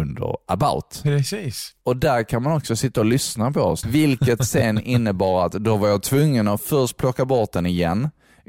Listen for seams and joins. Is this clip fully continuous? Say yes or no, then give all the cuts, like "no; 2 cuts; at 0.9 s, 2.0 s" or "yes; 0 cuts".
no; 1 cut; at 3.8 s